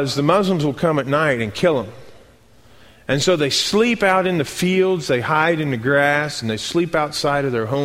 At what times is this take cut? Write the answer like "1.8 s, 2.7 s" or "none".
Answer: none